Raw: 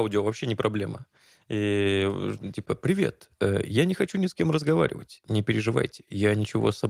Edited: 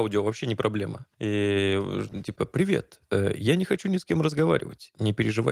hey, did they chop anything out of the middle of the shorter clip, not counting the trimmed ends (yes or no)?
yes